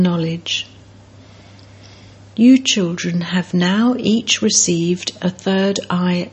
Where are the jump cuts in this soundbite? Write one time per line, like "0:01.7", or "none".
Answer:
none